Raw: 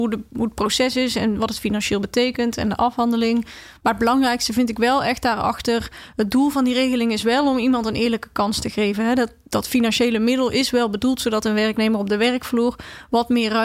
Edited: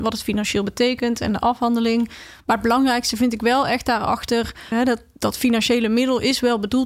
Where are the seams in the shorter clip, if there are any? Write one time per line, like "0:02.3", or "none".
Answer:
0:04.7